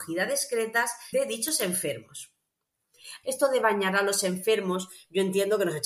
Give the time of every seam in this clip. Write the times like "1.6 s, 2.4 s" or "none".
1.1 s, 3.2 s